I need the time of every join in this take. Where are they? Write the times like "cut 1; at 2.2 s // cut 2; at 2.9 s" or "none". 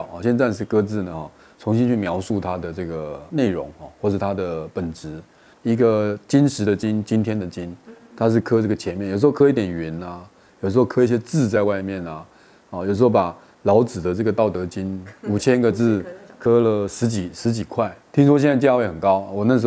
cut 1; at 5.5 s